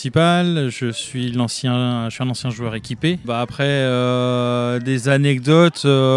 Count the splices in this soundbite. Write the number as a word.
one